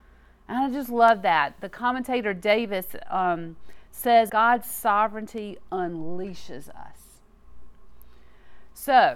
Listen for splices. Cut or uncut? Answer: cut